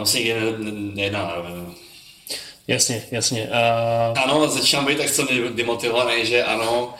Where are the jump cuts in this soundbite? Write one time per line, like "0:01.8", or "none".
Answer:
0:04.1